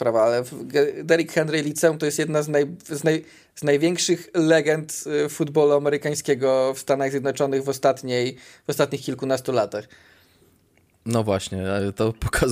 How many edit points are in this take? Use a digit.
0